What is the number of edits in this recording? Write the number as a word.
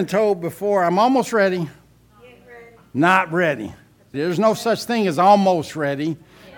two